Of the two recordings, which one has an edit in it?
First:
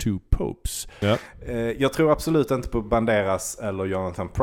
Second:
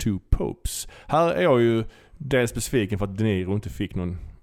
first; 1 cut; at 1.0 s

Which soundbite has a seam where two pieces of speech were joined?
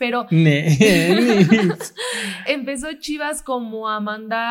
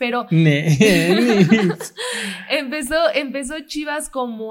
first; 1 cut; at 2.5 s

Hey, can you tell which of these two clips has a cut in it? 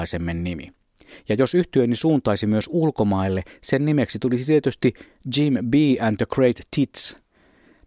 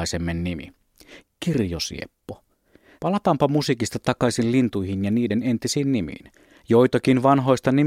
second; 2 cuts; at 1.2 s, 3.0 s

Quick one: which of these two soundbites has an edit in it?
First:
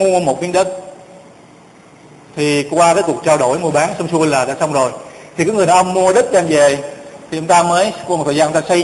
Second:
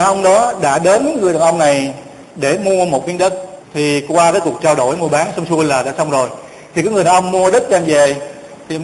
second; 1 cut; at 3.6 s

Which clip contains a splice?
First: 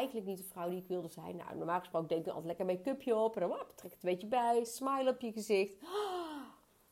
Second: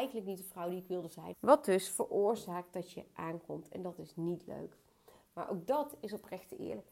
second; 1 cut; at 1.3 s

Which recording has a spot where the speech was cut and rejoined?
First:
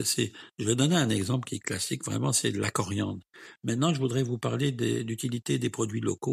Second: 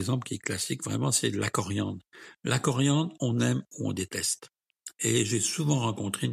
first; 1 cut; at 3.6 s

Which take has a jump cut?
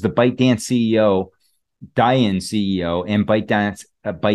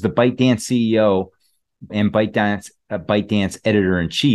second; 1 cut; at 1.9 s

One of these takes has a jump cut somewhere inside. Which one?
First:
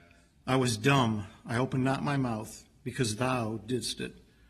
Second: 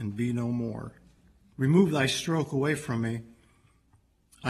second; 1 cut; at 1.5 s

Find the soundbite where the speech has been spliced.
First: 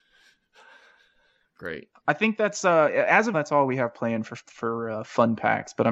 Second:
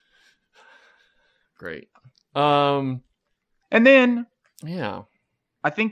first; 2 cuts; at 2.0 s, 3.3 s

